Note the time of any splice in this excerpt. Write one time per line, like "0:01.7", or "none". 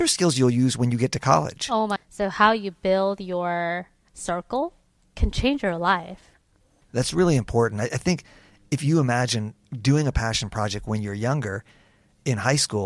0:02.0
0:05.0

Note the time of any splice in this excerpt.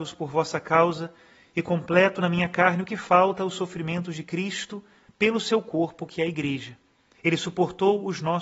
0:07.1

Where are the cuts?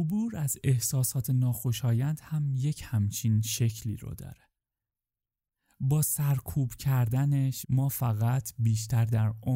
0:07.6

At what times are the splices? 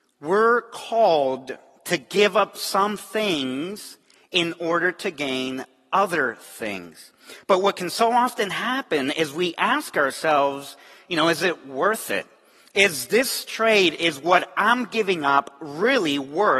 none

